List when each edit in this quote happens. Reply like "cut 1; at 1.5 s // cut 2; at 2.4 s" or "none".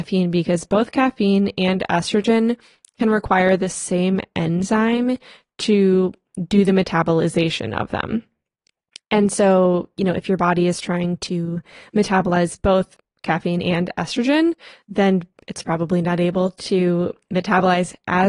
none